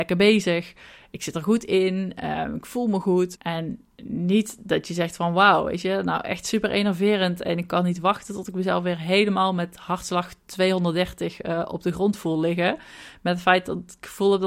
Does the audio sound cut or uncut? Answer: cut